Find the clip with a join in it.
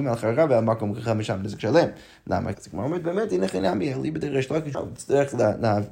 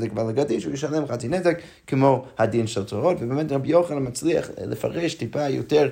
first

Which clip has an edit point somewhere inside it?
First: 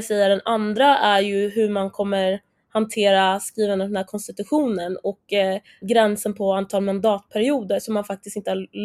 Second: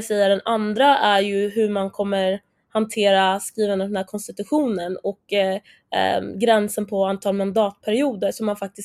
first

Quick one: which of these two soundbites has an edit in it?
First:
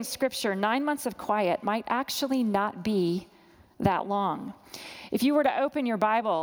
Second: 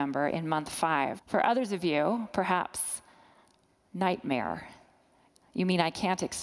second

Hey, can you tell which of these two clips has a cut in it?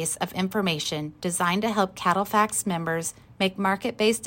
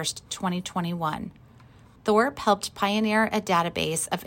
second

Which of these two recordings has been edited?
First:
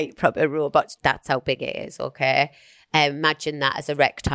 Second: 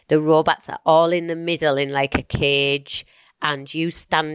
first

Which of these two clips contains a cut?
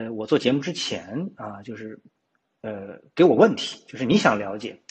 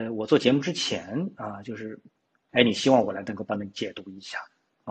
second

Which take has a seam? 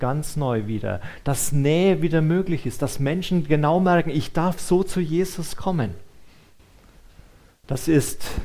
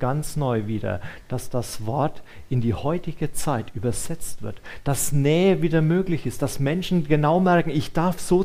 first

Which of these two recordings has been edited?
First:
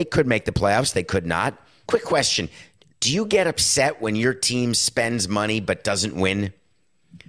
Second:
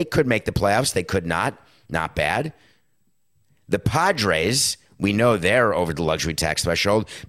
first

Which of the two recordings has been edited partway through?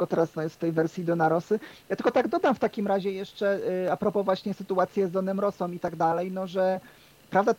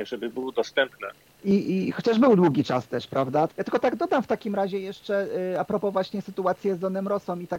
second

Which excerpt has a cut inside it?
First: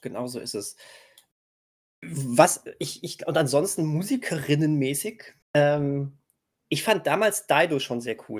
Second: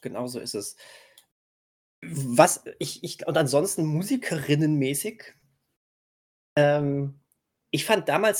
first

